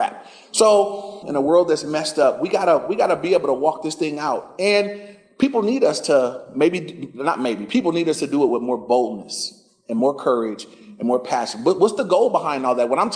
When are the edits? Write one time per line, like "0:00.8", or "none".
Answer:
0:01.2